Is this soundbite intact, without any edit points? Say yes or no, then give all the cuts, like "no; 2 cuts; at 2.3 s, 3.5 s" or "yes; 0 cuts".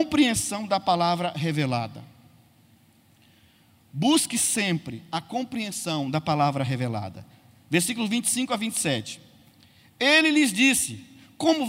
yes; 0 cuts